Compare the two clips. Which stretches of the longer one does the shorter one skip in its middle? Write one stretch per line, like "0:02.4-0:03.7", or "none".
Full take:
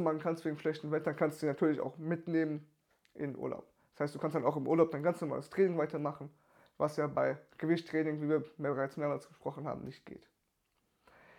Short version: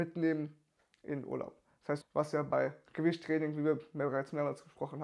0:04.1-0:06.7